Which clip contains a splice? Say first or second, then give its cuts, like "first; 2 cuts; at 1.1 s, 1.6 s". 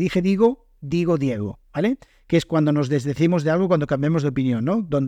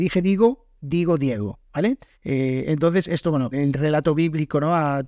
second; 2 cuts; at 2.1 s, 3.5 s